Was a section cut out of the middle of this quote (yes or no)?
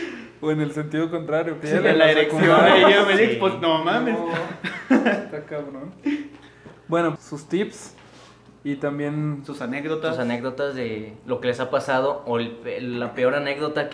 yes